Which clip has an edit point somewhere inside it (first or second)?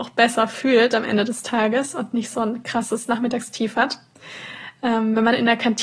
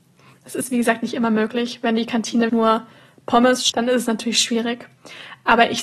second